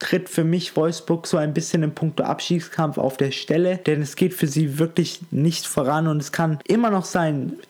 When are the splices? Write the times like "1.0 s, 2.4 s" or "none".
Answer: none